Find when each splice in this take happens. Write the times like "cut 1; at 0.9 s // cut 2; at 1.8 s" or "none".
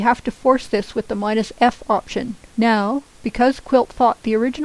cut 1; at 2.5 s